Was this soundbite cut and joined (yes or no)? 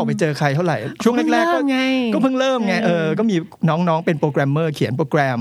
no